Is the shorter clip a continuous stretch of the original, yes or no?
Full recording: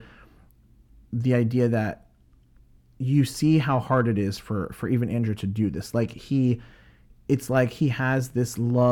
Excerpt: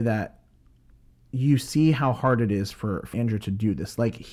no